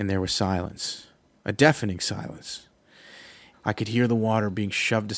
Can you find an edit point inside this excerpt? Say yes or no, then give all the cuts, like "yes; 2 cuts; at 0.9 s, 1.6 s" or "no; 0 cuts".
yes; 1 cut; at 3.5 s